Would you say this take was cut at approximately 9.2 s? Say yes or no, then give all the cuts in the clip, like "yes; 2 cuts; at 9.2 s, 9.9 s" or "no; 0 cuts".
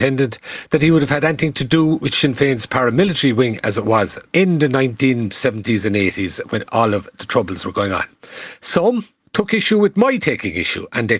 yes; 3 cuts; at 4.3 s, 6.6 s, 9.2 s